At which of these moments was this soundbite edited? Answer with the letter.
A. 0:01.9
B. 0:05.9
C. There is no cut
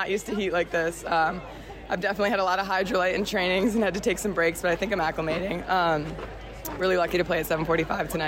C